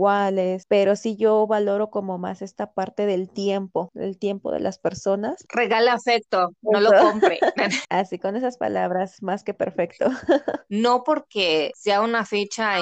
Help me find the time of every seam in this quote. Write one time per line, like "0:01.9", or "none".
none